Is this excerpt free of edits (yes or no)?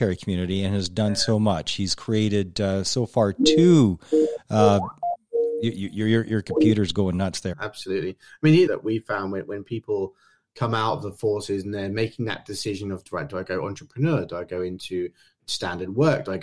no